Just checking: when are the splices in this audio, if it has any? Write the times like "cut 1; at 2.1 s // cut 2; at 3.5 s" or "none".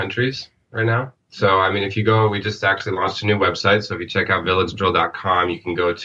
none